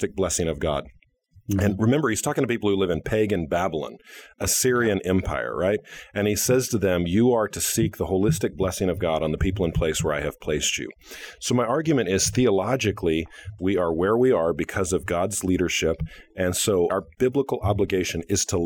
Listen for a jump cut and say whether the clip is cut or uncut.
cut